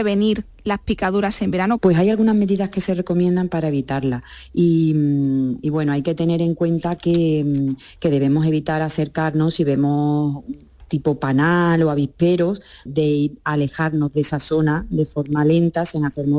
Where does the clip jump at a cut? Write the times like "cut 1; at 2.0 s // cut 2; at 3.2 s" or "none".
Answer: cut 1; at 1.8 s // cut 2; at 12.9 s